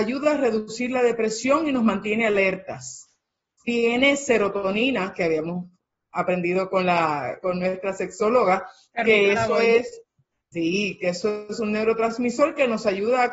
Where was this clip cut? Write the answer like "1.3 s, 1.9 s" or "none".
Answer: 7.4 s

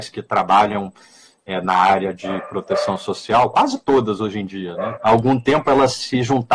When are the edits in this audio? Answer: 4.9 s

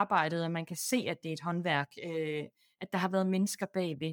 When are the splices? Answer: none

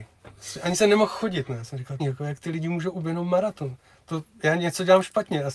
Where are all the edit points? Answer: 2.0 s

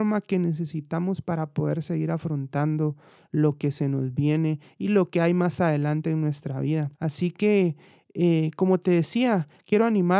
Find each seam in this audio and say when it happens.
6.9 s

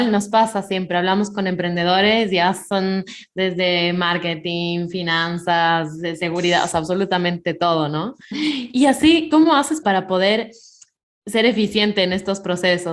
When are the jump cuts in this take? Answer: 8.3 s, 9.8 s

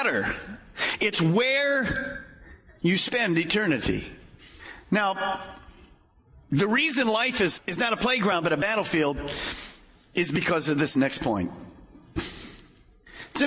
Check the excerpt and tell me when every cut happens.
7.6 s, 12.2 s

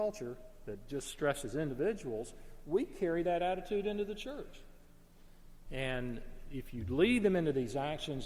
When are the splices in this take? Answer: 5.6 s

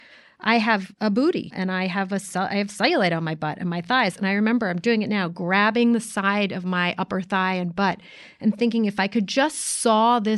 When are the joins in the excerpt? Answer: 1.5 s

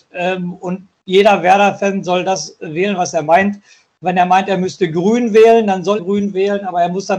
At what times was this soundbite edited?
6.0 s

